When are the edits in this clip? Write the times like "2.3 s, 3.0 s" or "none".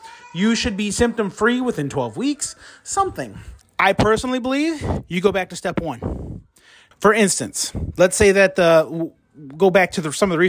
3.6 s, 6.9 s